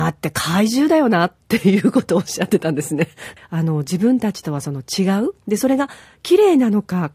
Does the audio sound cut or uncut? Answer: cut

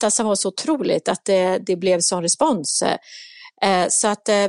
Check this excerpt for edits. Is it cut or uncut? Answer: uncut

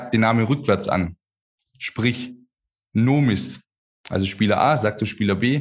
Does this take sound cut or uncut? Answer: uncut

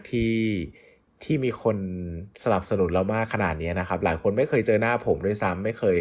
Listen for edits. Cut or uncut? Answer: cut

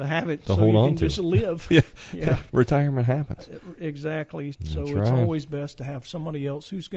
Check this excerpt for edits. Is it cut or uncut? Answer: cut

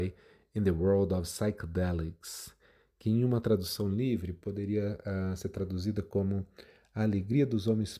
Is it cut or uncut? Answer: uncut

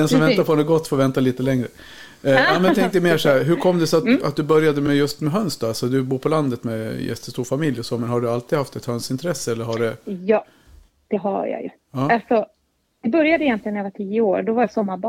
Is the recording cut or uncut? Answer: uncut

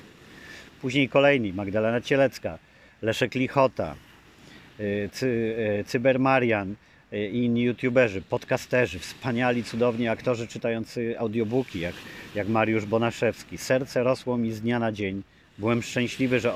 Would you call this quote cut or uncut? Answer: uncut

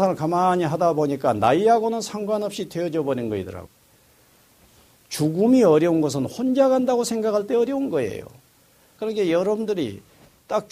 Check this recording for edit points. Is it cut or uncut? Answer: cut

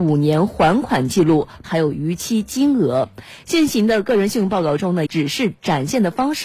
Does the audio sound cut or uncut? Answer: cut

